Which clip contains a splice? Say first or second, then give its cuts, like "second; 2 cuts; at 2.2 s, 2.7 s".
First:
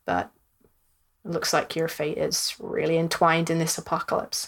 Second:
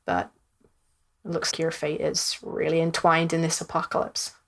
second; 1 cut; at 1.5 s